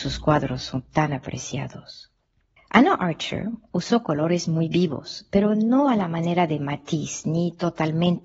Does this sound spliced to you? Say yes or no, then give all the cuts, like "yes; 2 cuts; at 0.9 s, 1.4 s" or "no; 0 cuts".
yes; 1 cut; at 2.6 s